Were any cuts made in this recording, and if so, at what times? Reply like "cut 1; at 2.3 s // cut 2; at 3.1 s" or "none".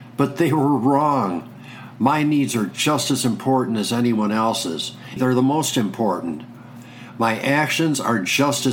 cut 1; at 5.2 s